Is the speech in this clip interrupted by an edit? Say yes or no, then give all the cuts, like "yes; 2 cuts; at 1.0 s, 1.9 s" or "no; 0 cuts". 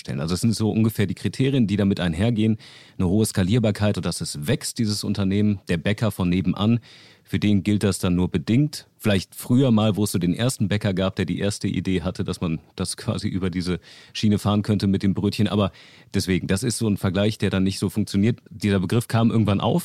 yes; 2 cuts; at 3.9 s, 18.5 s